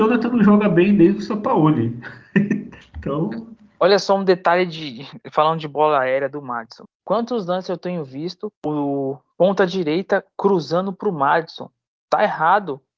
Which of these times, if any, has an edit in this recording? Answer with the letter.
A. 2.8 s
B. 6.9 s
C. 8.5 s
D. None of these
C